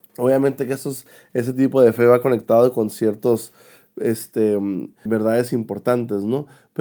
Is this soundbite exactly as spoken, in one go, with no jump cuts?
no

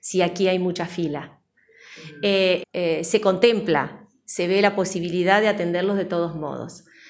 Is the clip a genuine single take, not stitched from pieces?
no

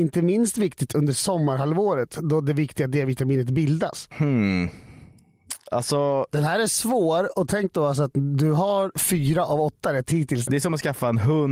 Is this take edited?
yes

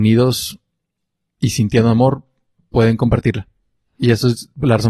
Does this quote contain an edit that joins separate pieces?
no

